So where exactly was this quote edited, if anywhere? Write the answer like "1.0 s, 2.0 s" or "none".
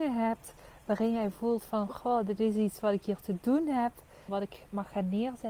4.3 s